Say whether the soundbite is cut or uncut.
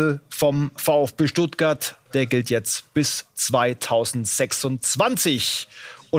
cut